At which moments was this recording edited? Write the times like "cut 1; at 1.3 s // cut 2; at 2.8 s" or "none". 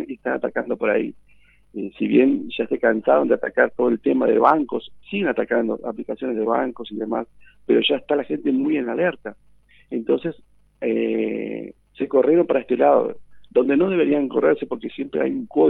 none

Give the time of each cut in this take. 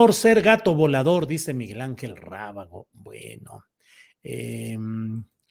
none

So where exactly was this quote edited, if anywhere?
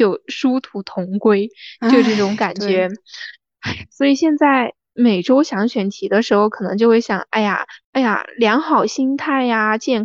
cut 1; at 7.8 s

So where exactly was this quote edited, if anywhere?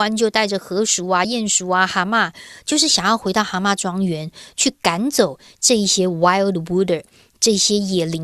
none

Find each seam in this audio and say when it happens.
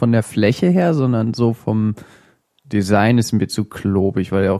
none

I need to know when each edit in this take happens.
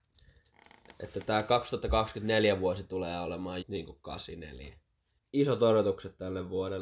cut 1; at 3.6 s // cut 2; at 5.2 s

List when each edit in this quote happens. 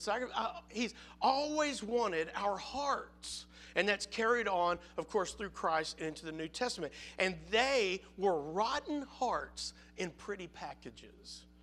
none

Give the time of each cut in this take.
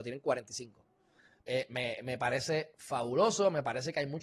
cut 1; at 1.4 s

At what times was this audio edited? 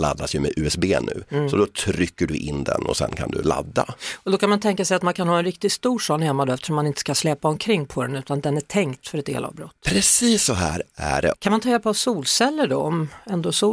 cut 1; at 9.0 s // cut 2; at 11.3 s

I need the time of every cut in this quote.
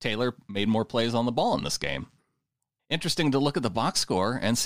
none

